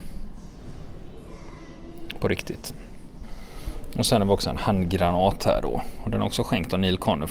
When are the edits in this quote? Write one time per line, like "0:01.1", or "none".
none